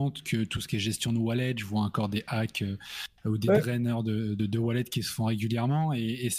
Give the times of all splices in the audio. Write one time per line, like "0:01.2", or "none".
none